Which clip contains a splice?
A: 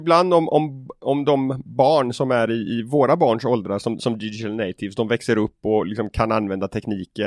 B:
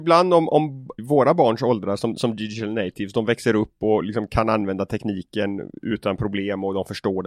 B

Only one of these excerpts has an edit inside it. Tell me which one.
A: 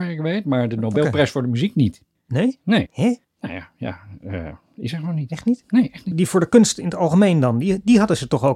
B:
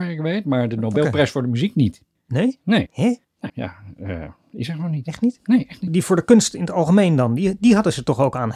B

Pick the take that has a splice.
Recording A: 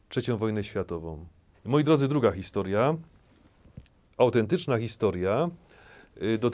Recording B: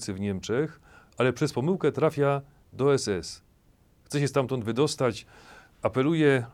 A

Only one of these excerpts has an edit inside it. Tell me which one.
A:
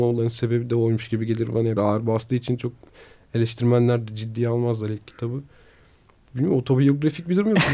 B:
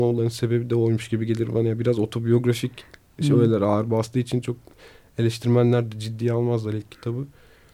A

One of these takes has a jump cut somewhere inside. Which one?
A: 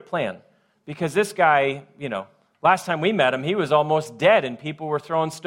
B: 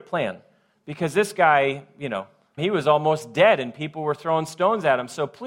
B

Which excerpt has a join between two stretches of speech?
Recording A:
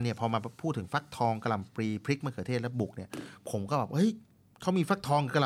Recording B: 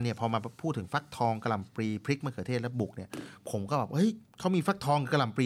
B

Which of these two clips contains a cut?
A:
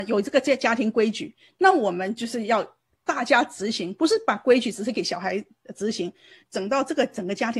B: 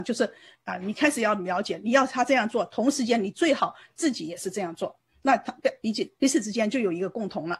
A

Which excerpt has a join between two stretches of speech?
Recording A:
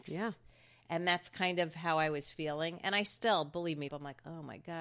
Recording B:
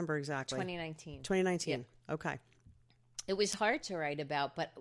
A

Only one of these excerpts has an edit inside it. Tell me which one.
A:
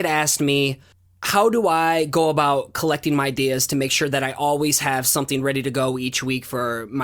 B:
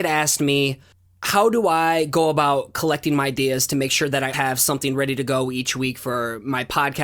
B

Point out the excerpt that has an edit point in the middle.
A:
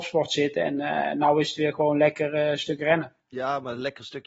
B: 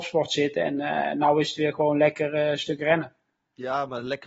A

